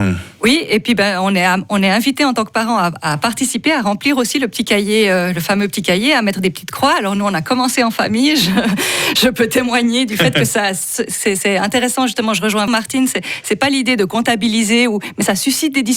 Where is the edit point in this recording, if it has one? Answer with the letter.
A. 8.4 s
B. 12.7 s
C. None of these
B